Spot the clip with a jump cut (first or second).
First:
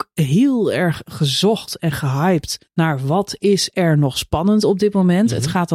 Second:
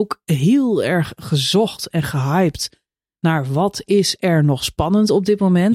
first